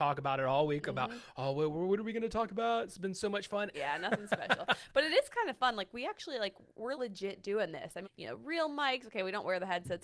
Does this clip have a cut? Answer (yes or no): yes